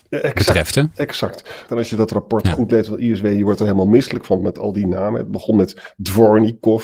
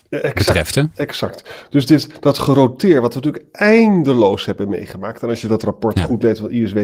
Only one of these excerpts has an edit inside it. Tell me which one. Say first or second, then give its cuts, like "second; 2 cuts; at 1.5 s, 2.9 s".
first; 1 cut; at 1.7 s